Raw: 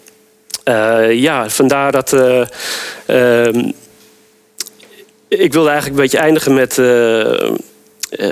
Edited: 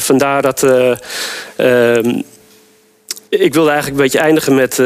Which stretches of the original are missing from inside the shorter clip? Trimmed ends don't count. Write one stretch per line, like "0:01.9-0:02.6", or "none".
0:04.8-0:05.3